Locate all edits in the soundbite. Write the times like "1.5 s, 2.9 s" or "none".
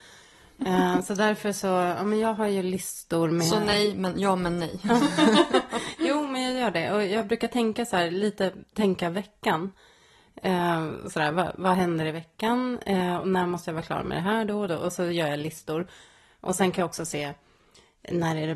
none